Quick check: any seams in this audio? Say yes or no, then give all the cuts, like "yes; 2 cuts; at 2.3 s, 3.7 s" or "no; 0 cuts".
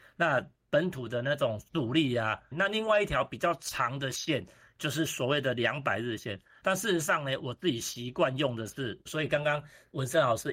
yes; 3 cuts; at 2.5 s, 6.6 s, 9.1 s